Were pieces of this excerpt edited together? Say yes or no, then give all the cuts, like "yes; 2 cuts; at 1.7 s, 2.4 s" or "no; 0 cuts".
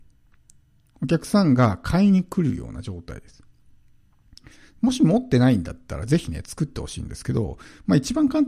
no; 0 cuts